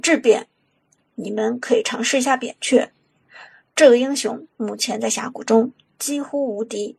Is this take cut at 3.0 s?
no; 2 cuts; at 1.1 s, 4.5 s

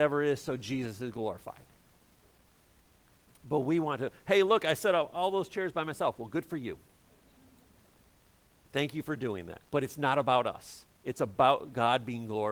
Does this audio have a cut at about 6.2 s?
no; 1 cut; at 9.6 s

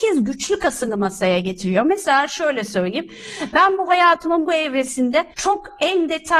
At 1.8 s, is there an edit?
no; 1 cut; at 5.3 s

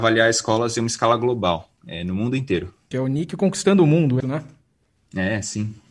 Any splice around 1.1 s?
no; 2 cuts; at 2.9 s, 4.2 s

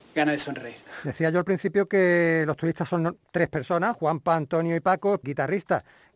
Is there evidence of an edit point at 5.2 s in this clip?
yes; 1 cut; at 5.2 s

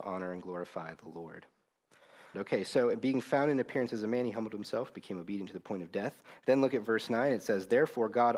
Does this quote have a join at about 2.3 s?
yes; 1 cut; at 2.3 s

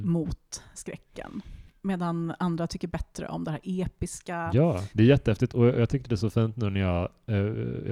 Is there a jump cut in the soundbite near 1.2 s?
no; 1 cut; at 4.9 s

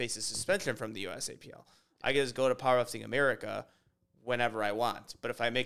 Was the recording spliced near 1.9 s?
no; 0 cuts

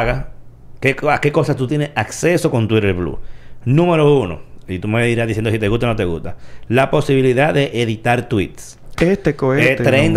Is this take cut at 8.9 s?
yes; 1 cut; at 8.9 s

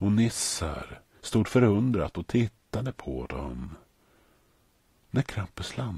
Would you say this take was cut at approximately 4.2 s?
no; 1 cut; at 1.2 s

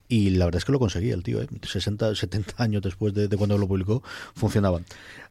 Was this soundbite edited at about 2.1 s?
no; 0 cuts

